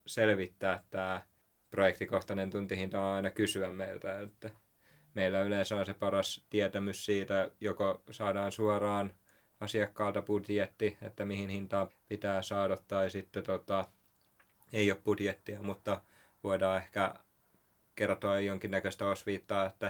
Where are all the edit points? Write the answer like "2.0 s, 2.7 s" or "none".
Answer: 11.9 s